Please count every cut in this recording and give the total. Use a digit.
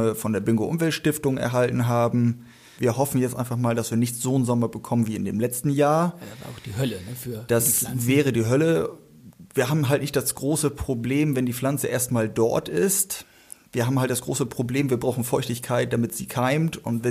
1